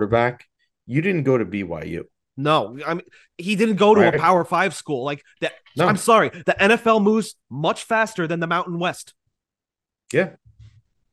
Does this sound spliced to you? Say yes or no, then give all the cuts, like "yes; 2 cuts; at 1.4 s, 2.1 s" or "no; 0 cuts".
no; 0 cuts